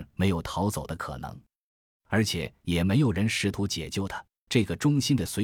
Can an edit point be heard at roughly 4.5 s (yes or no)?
yes